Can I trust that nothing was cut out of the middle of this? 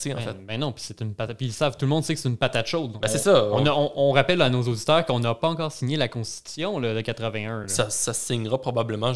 yes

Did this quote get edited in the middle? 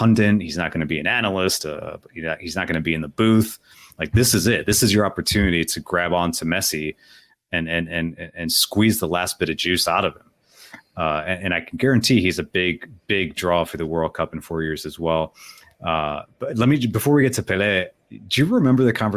no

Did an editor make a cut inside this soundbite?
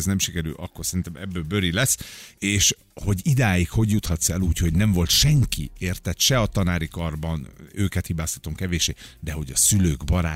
yes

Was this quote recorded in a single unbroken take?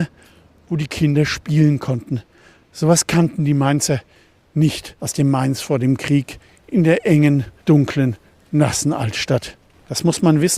no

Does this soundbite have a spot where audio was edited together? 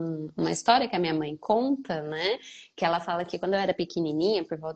no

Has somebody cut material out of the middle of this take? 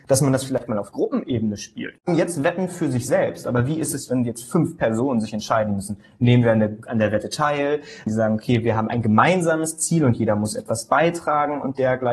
yes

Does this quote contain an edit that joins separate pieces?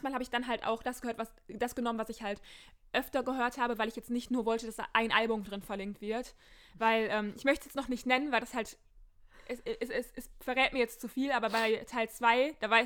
no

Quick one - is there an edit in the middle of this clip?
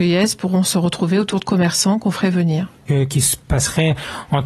yes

